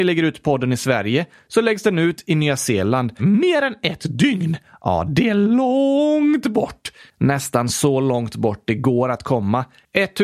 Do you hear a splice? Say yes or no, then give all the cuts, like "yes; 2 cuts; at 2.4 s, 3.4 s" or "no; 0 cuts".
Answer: yes; 1 cut; at 3.2 s